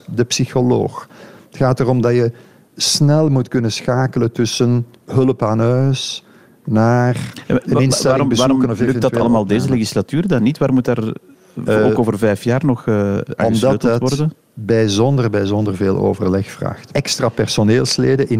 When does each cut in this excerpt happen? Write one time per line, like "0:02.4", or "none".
0:16.9